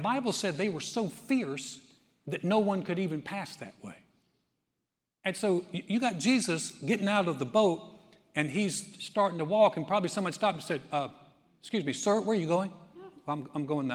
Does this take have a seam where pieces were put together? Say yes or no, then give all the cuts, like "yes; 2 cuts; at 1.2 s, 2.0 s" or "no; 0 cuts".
no; 0 cuts